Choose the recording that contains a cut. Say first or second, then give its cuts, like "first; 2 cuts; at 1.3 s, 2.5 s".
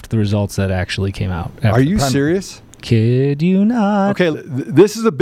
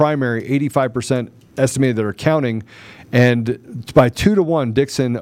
first; 1 cut; at 4.3 s